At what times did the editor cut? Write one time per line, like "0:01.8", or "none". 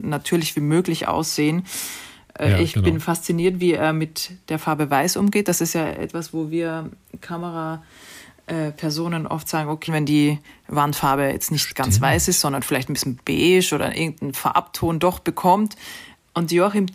0:09.9